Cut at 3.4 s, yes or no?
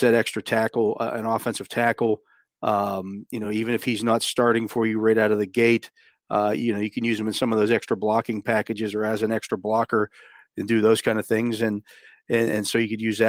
no